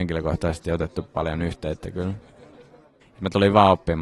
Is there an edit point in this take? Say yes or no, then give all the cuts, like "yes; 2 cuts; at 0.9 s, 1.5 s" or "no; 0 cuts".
yes; 1 cut; at 3.0 s